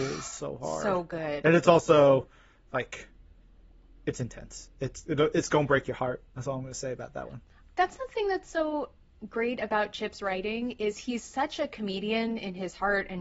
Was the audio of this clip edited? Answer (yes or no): no